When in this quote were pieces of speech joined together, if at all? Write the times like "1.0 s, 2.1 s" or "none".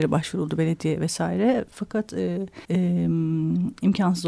2.6 s